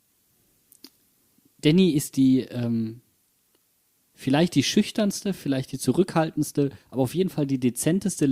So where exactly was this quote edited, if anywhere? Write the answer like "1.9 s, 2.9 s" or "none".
none